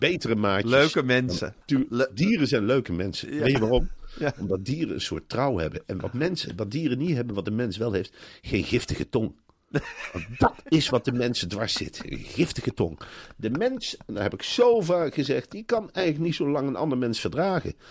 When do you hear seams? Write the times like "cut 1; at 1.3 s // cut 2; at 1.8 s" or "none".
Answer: cut 1; at 1.6 s